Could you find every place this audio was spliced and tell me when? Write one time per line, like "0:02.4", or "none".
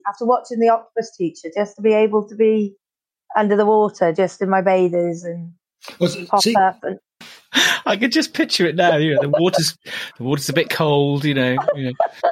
0:07.2